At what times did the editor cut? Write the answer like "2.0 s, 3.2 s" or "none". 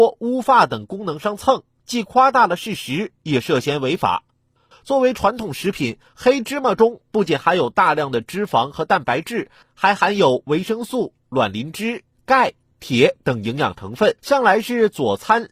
4.7 s, 14.2 s